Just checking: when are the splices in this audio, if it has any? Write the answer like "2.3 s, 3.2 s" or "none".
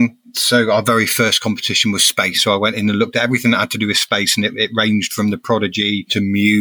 2.3 s